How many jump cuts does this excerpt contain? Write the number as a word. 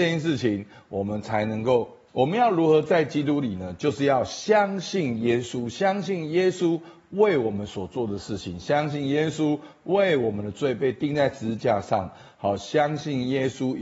one